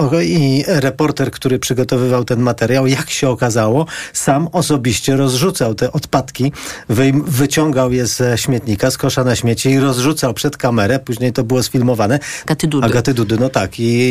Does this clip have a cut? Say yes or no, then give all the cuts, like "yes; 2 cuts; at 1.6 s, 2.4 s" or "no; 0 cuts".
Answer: yes; 1 cut; at 12.5 s